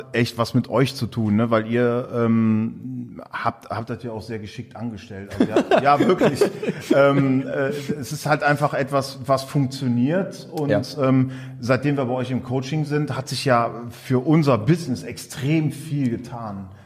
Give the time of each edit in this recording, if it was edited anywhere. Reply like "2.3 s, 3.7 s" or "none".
none